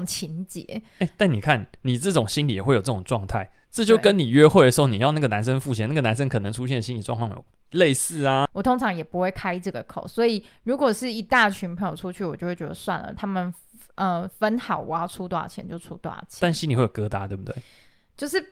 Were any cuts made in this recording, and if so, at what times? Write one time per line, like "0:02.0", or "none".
0:08.5